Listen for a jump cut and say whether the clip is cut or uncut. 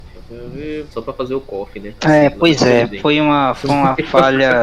cut